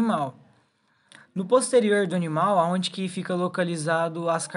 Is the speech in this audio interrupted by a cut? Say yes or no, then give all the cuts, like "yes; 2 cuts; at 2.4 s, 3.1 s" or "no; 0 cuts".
no; 0 cuts